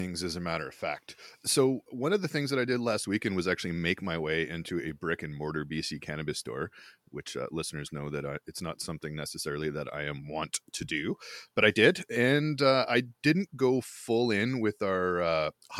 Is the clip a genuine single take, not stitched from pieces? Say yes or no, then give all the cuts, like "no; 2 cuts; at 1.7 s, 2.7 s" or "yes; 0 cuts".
yes; 0 cuts